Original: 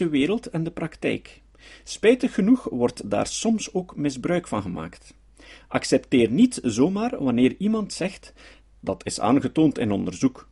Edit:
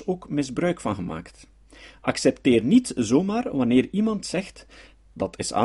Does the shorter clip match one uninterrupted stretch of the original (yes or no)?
yes